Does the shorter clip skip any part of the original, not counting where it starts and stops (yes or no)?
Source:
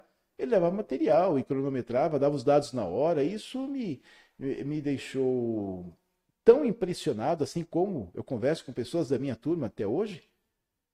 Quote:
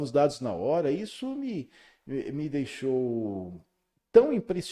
no